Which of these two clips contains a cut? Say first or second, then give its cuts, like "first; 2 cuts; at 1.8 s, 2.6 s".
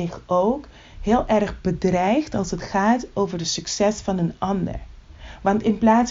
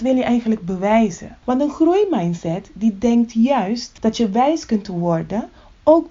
second; 1 cut; at 1.4 s